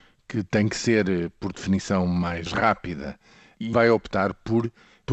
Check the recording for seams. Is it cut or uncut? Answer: cut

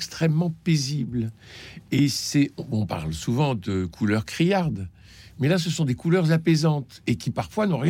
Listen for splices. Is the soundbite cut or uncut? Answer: uncut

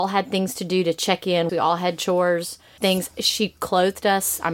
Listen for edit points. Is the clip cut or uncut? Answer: cut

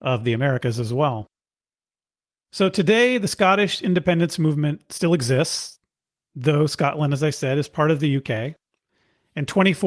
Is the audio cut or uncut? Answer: uncut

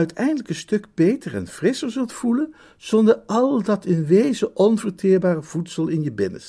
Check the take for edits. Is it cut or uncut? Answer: uncut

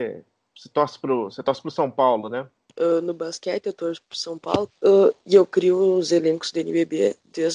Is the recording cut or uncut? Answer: cut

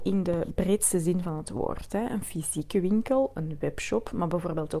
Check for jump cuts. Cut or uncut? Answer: uncut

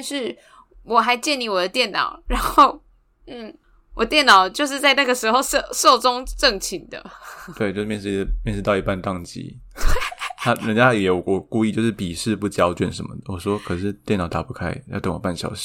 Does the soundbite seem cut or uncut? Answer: uncut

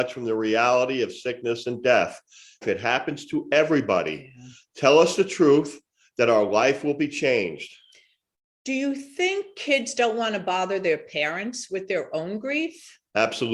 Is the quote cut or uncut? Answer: cut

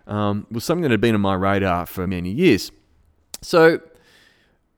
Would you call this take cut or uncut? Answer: cut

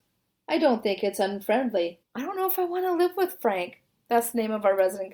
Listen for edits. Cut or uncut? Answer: cut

